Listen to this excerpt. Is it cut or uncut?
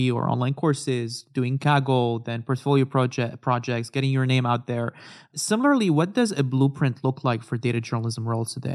uncut